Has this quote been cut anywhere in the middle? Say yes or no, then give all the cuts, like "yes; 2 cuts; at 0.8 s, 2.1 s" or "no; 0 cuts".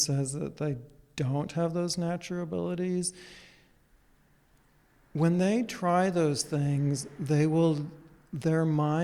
no; 0 cuts